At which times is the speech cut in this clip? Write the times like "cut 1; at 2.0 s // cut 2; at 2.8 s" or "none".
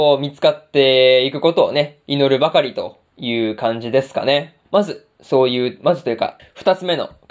cut 1; at 4.6 s // cut 2; at 6.4 s